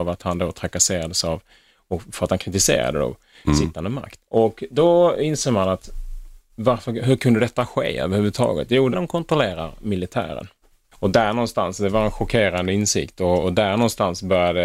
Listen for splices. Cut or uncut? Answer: cut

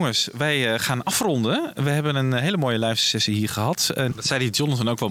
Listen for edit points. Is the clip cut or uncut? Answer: cut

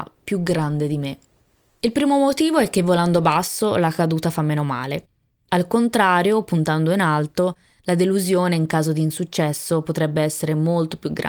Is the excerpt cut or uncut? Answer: uncut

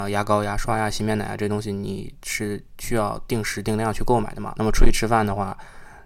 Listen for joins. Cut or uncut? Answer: cut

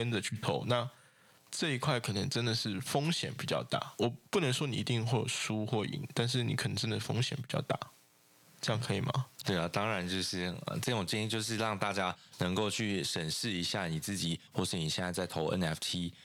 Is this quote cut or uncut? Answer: cut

